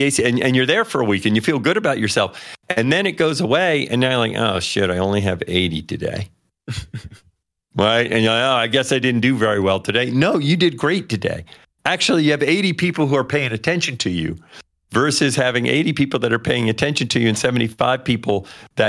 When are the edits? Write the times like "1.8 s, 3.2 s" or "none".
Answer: none